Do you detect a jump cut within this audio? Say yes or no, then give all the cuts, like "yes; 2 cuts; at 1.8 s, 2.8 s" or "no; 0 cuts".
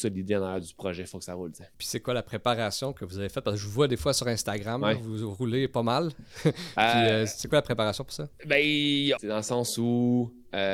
yes; 2 cuts; at 1.7 s, 9.2 s